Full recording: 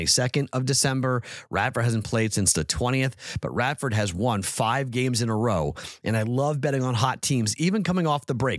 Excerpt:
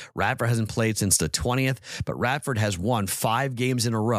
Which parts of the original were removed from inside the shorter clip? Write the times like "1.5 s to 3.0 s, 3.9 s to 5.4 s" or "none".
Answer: none